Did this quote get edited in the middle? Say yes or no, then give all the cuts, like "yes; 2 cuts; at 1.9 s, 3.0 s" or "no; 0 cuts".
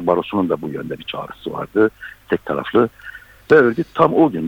no; 0 cuts